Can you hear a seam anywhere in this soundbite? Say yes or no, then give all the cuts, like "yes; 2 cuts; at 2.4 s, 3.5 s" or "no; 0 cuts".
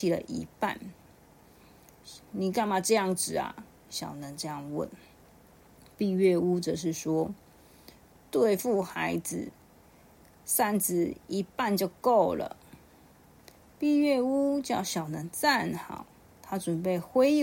no; 0 cuts